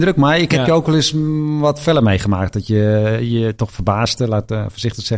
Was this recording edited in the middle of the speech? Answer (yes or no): no